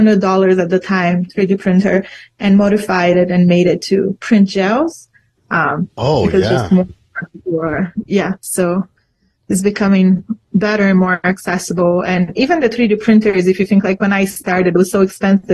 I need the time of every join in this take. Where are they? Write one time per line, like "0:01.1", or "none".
0:05.3